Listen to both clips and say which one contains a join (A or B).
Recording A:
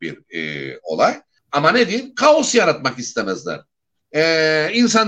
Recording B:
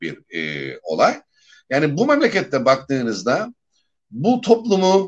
A